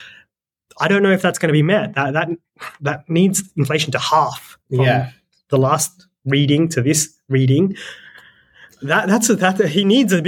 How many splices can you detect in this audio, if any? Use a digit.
0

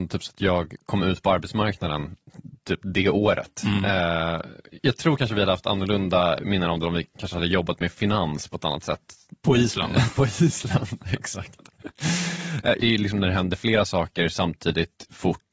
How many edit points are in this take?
2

